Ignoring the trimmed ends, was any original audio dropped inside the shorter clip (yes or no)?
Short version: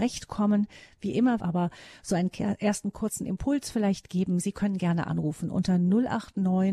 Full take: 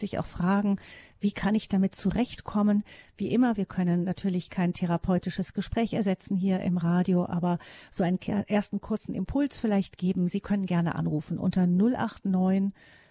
yes